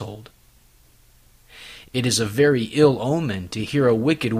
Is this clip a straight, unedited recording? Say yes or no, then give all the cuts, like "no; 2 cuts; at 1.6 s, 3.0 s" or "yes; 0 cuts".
no; 1 cut; at 1.8 s